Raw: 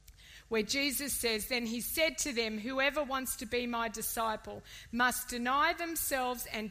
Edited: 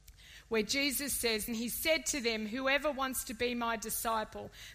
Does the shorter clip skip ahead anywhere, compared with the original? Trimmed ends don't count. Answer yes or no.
yes